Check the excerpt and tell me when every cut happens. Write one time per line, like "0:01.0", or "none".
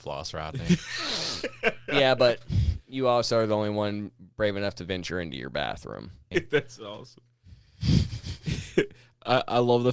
0:06.3